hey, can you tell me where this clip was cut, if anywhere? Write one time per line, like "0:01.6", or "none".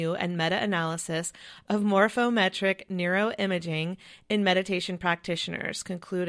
none